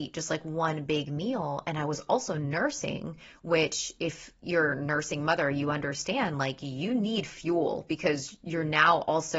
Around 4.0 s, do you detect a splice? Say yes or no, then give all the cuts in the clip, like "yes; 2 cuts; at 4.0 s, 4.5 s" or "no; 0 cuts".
no; 0 cuts